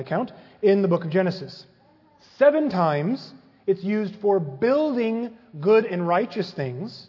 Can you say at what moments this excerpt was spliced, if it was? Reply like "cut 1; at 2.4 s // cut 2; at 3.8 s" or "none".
none